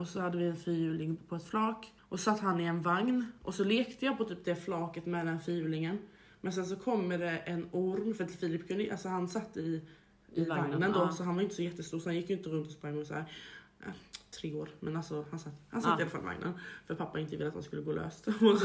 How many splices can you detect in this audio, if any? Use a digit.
0